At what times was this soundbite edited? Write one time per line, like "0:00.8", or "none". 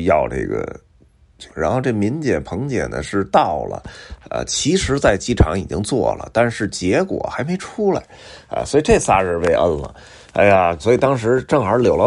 0:01.5
0:10.8